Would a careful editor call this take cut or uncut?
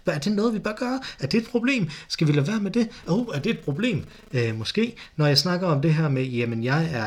cut